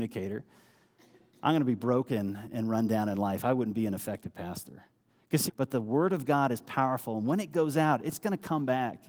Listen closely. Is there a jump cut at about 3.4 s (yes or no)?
no